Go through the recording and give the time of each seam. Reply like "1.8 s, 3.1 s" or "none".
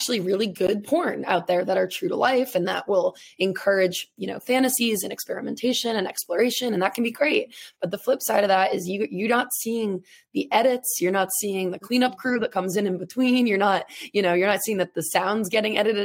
none